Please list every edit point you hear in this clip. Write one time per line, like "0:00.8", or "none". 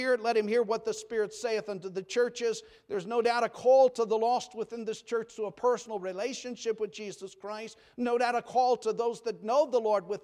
none